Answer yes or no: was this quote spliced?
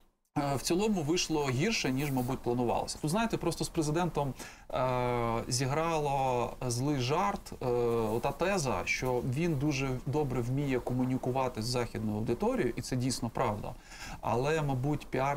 no